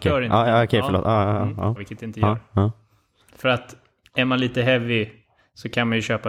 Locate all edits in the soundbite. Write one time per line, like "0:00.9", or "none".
0:01.8

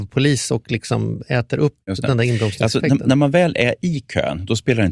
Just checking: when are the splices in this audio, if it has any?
none

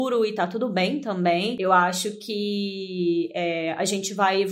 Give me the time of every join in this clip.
none

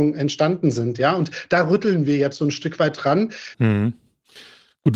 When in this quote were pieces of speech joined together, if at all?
0:03.5

